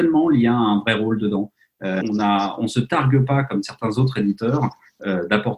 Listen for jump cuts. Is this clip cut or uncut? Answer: cut